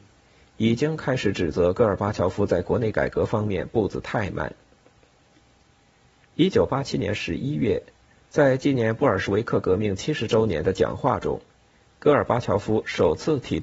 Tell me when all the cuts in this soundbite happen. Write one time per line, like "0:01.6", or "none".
none